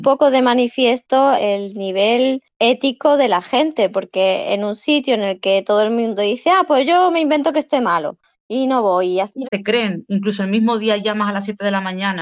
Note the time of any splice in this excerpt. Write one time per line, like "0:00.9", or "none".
0:01.4
0:09.4